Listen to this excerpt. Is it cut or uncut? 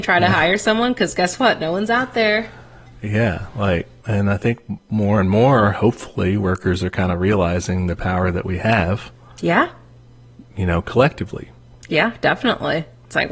uncut